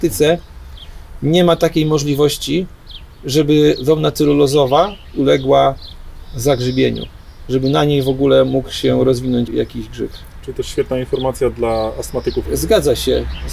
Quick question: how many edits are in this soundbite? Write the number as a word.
two